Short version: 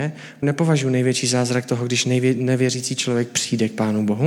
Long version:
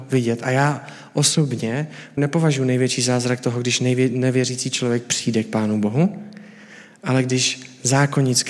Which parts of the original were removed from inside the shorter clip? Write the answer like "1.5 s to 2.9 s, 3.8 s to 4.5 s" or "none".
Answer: none